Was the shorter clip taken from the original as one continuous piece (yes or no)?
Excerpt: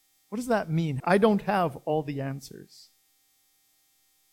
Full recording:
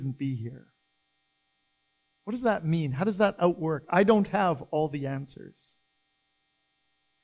no